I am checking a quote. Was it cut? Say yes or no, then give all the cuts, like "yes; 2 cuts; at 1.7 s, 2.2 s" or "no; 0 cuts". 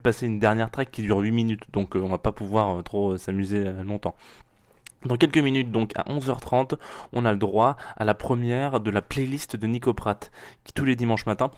no; 0 cuts